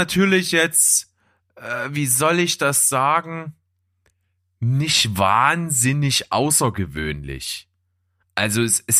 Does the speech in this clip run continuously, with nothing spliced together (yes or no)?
yes